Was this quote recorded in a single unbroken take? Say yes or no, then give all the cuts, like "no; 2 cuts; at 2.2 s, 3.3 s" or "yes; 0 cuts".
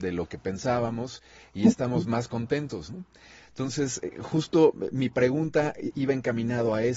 yes; 0 cuts